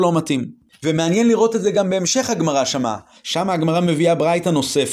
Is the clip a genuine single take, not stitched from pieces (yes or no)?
yes